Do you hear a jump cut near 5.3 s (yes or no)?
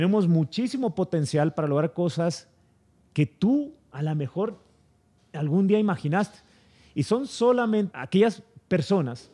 no